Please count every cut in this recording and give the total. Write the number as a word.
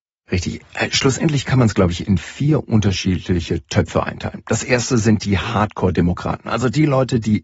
zero